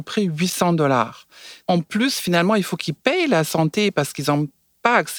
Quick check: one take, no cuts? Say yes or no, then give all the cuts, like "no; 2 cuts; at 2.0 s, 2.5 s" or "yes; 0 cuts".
no; 1 cut; at 1.6 s